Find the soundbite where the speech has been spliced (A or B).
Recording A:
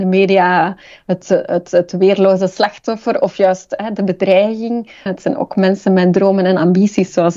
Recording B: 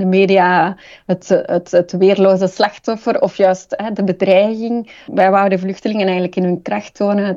A